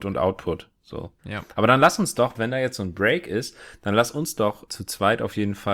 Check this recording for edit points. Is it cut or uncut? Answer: cut